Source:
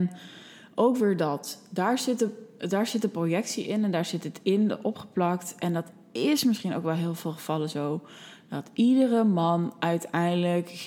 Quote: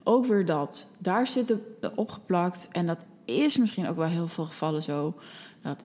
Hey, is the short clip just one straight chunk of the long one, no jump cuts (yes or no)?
no